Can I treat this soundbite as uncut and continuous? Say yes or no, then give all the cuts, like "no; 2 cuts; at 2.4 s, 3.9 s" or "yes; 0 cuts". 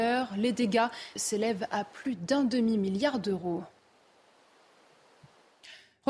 no; 1 cut; at 1.2 s